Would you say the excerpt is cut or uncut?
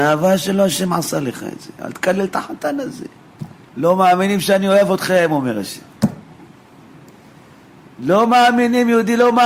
cut